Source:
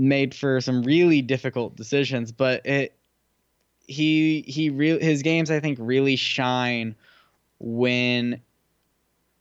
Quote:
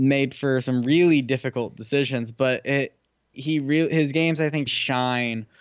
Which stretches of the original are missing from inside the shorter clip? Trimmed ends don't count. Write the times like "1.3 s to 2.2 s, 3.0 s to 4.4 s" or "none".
3.3 s to 4.4 s, 5.8 s to 6.2 s